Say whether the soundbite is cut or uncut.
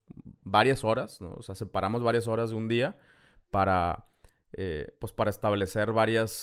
uncut